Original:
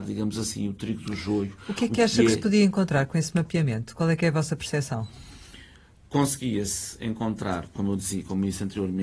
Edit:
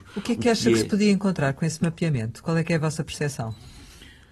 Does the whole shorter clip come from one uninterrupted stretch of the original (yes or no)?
yes